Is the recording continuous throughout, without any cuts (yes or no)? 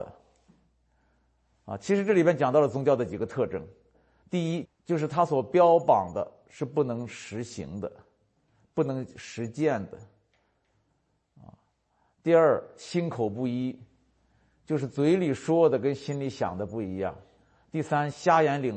no